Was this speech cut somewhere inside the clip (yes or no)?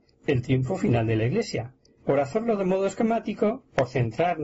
yes